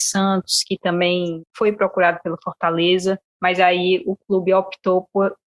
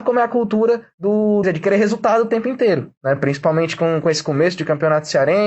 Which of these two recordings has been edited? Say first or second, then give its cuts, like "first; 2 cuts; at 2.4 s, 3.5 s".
second; 2 cuts; at 1.4 s, 3.0 s